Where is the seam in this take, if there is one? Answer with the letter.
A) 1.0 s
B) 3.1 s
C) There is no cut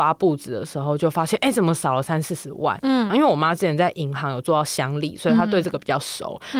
B